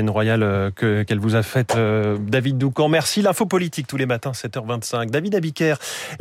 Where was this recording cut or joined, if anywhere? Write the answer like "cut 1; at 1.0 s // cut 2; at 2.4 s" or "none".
none